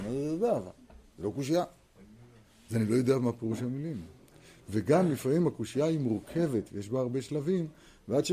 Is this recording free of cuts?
yes; 0 cuts

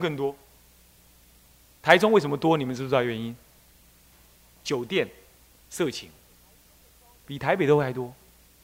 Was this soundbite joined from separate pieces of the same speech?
yes; 1 cut; at 4.6 s

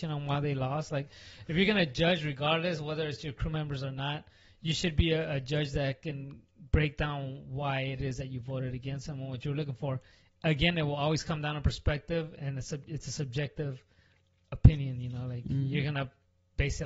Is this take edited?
no; 0 cuts

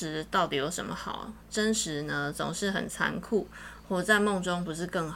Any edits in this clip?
no; 0 cuts

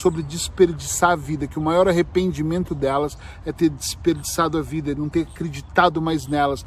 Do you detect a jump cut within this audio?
no; 0 cuts

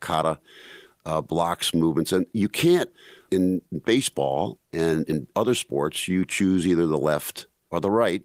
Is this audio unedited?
yes; 0 cuts

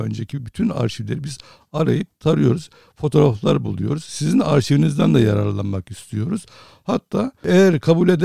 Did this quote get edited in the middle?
no; 0 cuts

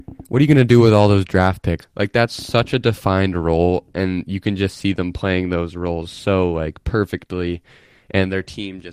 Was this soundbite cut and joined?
yes; 1 cut; at 1.8 s

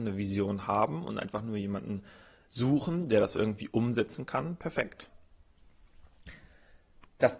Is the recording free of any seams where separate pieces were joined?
yes; 0 cuts

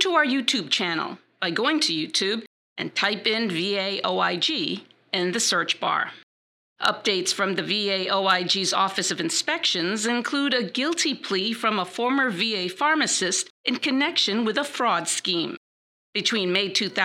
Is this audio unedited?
yes; 0 cuts

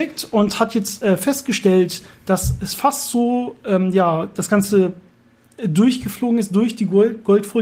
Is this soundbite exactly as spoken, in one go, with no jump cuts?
yes; 0 cuts

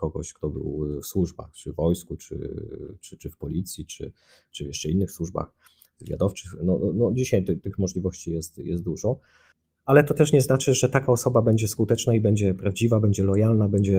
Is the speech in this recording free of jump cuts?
yes; 0 cuts

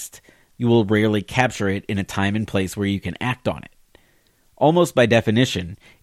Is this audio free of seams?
yes; 0 cuts

